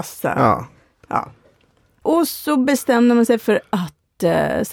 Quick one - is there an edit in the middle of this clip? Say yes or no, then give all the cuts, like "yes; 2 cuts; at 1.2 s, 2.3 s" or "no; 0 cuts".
yes; 1 cut; at 2.0 s